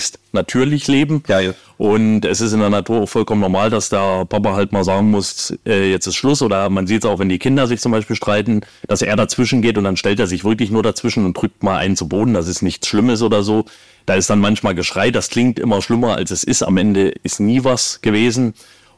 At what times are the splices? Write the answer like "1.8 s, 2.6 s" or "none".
none